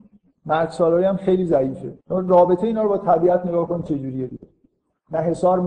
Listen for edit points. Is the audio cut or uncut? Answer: cut